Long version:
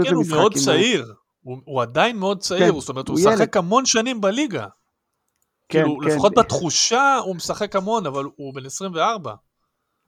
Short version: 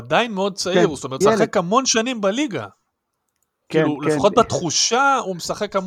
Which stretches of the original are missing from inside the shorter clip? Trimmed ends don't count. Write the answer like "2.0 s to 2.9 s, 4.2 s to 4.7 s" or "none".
3.1 s to 3.2 s

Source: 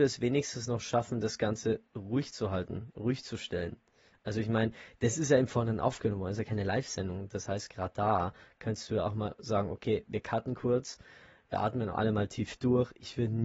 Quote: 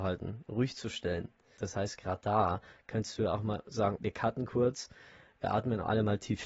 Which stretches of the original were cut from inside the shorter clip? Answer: 4.1 s to 7.3 s, 9.7 s to 10.1 s

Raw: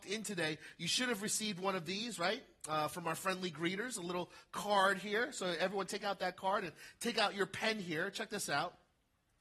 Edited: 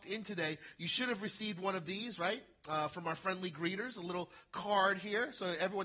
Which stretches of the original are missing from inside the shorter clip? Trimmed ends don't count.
none

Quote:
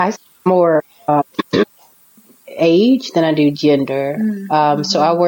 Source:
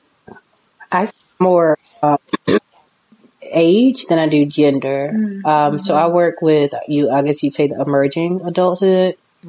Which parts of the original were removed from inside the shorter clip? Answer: none

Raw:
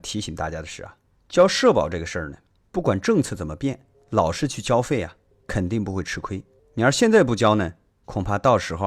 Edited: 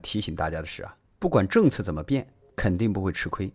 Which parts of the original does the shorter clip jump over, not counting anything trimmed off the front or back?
1.1 s to 2.6 s, 4.0 s to 5.4 s

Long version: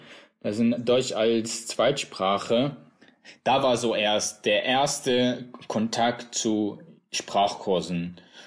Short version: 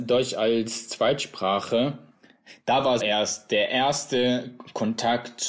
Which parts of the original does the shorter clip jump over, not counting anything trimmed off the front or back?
3.8 s to 3.9 s

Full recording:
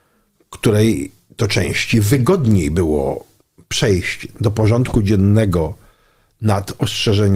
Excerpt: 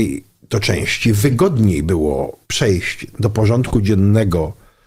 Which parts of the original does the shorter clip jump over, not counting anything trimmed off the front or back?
3.3 s to 3.6 s

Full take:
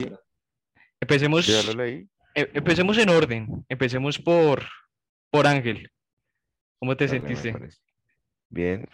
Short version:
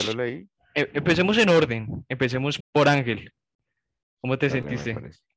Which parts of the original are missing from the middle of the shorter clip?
4.2 s to 5.2 s

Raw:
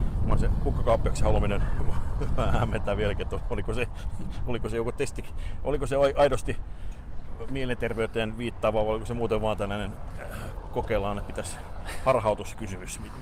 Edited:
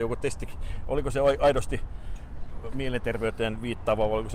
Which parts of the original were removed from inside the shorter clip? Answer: none

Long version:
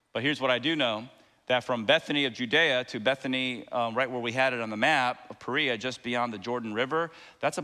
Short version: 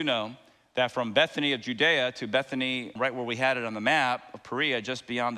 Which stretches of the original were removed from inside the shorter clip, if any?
3.7 s to 3.9 s

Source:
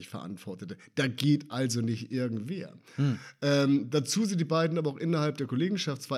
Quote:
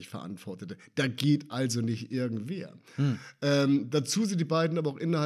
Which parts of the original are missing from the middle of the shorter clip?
none

